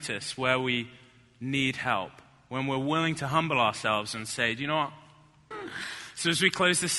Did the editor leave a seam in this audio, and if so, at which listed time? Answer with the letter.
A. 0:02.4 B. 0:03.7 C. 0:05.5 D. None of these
C